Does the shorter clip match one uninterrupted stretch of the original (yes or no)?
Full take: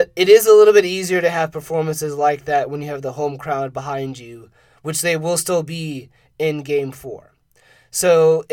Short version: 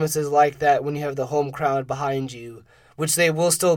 yes